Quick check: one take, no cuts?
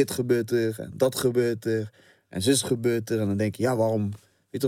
yes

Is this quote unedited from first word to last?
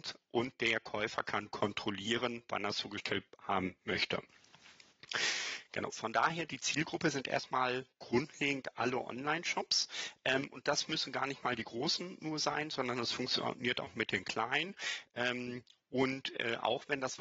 yes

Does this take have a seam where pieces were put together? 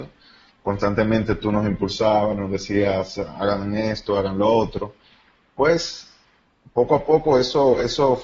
no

